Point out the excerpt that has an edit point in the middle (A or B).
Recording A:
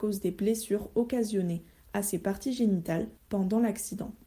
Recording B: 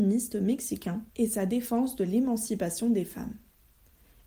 B